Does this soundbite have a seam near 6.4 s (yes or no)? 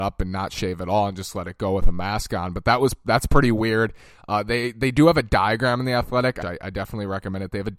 yes